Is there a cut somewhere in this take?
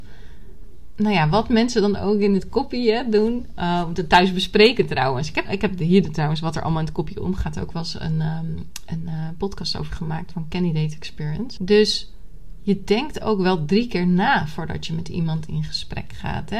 yes; 2 cuts; at 5.5 s, 11.6 s

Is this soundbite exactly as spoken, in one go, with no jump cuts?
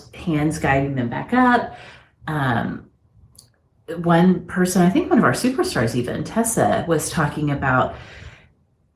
yes; 0 cuts

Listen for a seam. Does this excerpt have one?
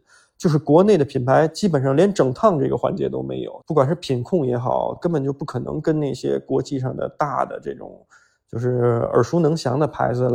yes; 2 cuts; at 3.6 s, 5.0 s

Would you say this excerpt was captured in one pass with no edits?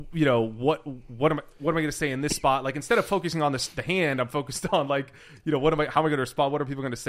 yes; 0 cuts

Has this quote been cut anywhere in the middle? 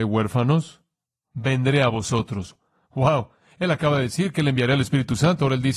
no; 0 cuts

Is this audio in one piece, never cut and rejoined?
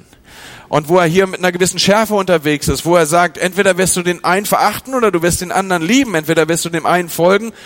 yes; 0 cuts

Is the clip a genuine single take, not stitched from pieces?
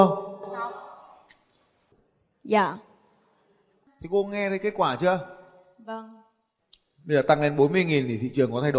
yes; 0 cuts

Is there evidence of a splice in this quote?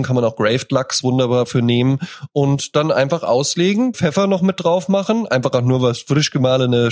yes; 1 cut; at 3.9 s

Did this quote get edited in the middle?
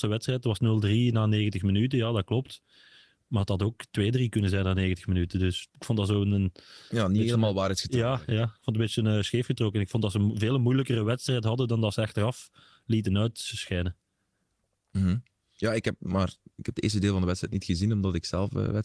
no; 0 cuts

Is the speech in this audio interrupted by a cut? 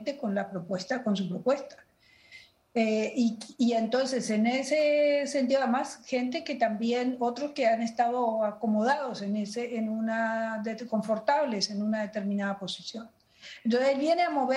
no; 0 cuts

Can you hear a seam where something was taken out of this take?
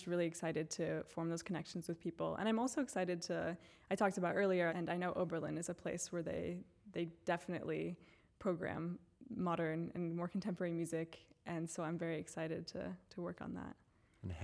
yes; 1 cut; at 4.7 s

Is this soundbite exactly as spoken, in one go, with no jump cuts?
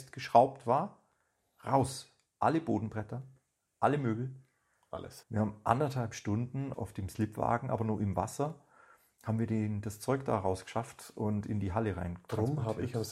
no; 2 cuts; at 5.2 s, 6.7 s

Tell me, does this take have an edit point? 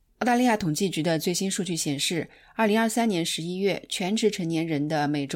no; 0 cuts

